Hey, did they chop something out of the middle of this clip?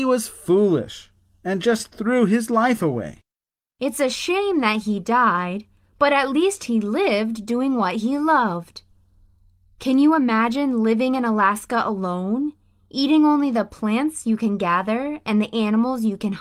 yes; 1 cut; at 3.6 s

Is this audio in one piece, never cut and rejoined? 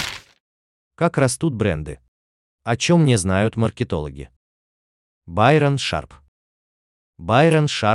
yes; 0 cuts

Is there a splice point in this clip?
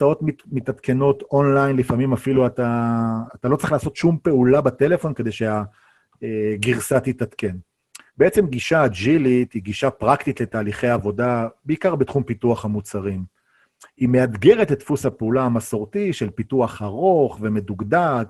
yes; 2 cuts; at 3.3 s, 8.1 s

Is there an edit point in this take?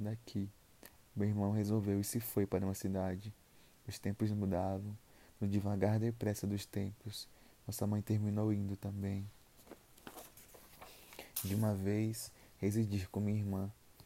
no; 0 cuts

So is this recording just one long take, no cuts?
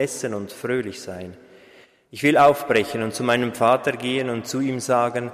no; 1 cut; at 2.1 s

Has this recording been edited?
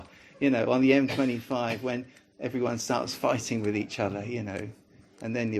no; 0 cuts

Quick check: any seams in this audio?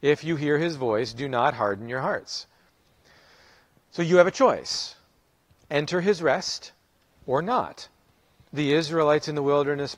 no; 0 cuts

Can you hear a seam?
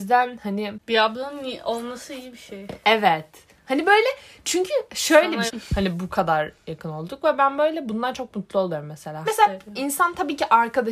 yes; 2 cuts; at 5.5 s, 9.3 s

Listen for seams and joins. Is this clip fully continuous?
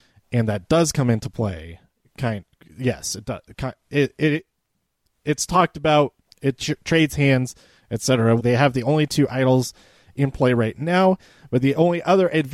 no; 1 cut; at 8.4 s

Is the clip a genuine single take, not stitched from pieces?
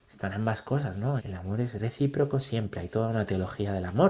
no; 1 cut; at 1.2 s

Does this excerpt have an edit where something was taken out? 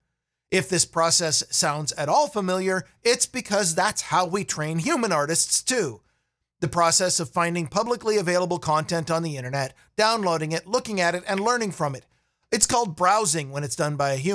no; 0 cuts

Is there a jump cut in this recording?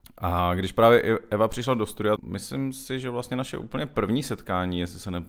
yes; 1 cut; at 2.2 s

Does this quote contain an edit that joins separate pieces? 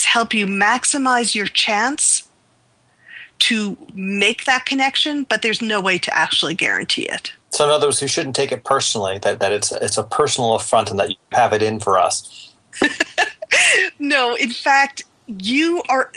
yes; 1 cut; at 7.4 s

